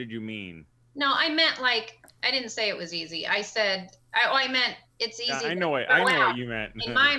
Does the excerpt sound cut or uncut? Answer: uncut